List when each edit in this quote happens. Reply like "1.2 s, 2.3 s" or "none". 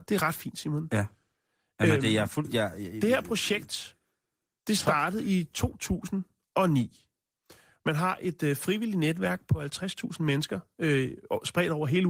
none